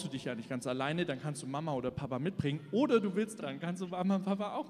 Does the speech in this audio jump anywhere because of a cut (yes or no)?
yes